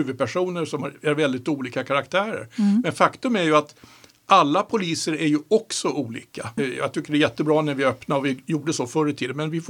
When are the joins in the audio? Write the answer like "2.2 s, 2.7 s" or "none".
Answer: 6.6 s

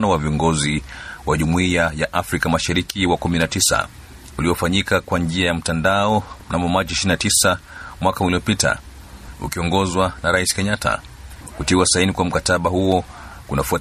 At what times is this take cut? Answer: 11.5 s

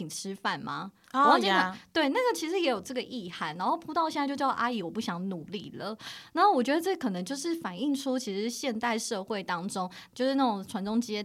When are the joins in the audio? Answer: 10.1 s

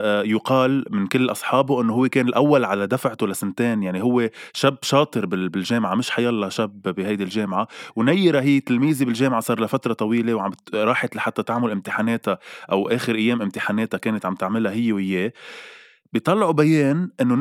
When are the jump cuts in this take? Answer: none

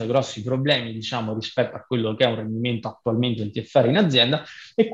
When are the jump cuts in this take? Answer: none

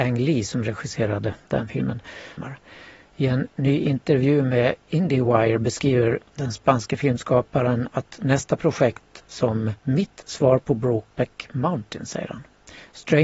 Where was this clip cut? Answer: 2.4 s, 9.8 s

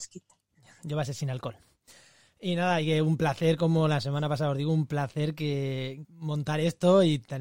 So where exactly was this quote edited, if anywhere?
6.0 s

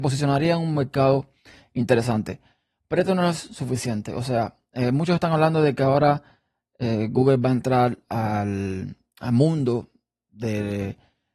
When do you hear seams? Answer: none

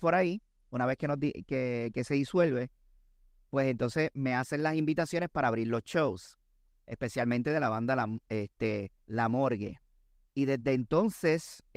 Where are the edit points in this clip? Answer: 9.0 s

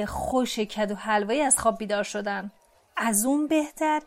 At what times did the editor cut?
none

